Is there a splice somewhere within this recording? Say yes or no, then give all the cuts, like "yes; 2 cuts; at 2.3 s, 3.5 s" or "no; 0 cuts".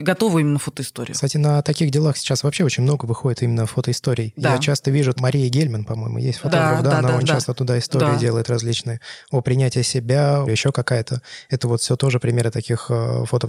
yes; 2 cuts; at 7.2 s, 10.5 s